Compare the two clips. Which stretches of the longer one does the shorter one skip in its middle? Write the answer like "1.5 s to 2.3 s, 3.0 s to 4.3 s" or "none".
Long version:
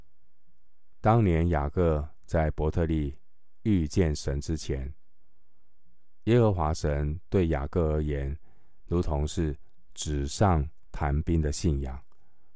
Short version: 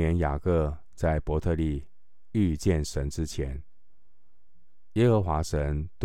none

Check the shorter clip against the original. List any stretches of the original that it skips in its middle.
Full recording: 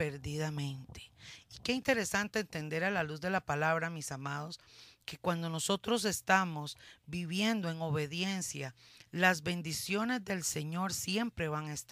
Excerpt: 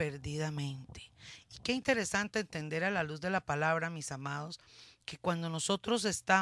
none

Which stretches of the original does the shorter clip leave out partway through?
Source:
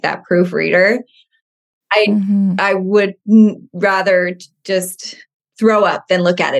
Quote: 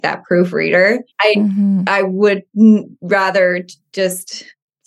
1.1 s to 1.8 s

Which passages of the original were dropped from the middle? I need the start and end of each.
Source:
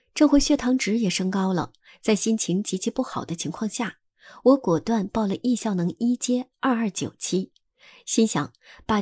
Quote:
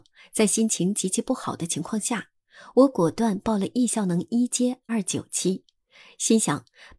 6.6 s to 6.8 s

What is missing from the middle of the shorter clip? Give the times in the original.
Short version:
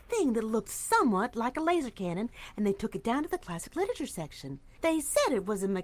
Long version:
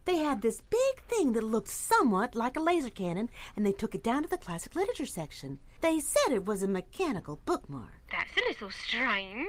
none

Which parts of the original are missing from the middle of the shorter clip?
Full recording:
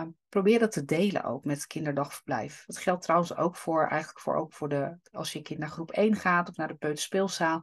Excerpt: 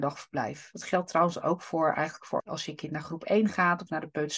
4.3 s to 5.1 s

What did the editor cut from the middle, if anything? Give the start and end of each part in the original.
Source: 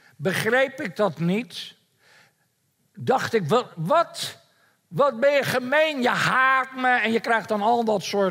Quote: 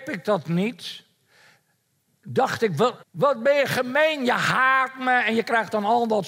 3.7 s to 4.8 s

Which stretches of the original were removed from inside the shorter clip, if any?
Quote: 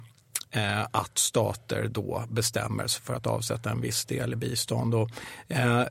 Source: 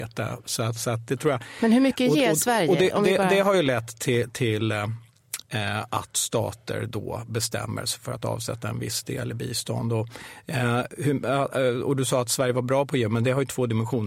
none

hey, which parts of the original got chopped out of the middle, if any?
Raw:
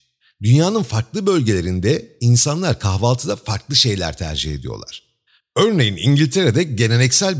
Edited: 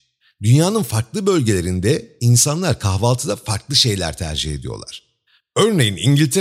none

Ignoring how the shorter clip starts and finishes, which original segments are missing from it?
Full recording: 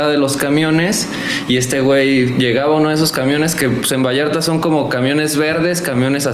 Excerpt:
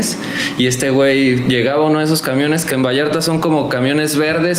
3.6 s to 3.9 s

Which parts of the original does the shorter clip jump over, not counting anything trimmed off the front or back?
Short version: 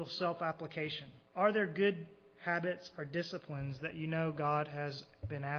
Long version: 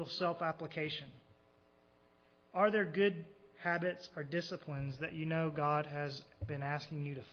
1.3 s to 2.4 s

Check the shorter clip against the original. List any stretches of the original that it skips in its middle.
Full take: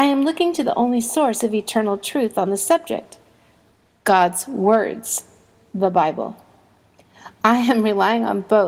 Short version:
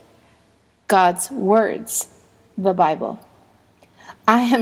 none

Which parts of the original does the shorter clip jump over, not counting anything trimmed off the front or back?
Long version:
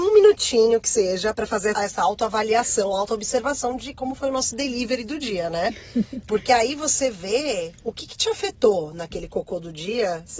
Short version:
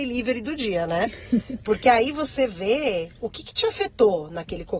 none

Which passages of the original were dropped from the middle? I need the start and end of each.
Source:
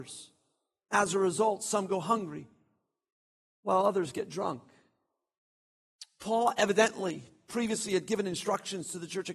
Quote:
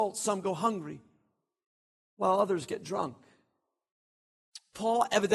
none

